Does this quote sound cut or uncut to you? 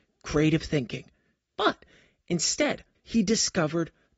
cut